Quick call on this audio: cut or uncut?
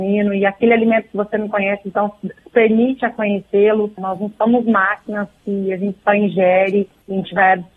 cut